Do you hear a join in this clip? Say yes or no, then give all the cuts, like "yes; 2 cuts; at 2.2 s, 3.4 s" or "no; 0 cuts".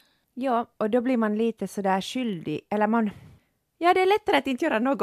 no; 0 cuts